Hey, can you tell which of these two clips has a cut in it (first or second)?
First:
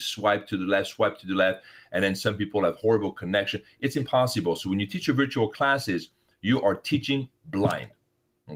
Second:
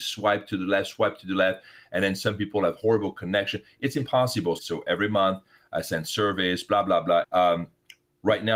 second